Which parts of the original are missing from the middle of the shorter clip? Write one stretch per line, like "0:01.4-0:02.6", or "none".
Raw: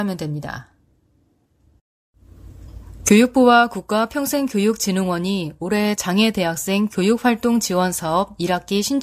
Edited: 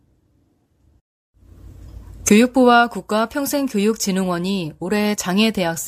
none